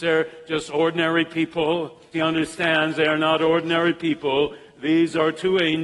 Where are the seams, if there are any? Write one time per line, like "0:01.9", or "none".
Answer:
0:02.1